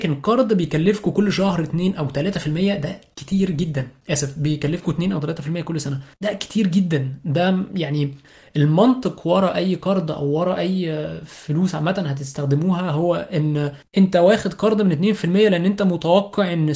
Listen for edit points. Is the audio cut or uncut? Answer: cut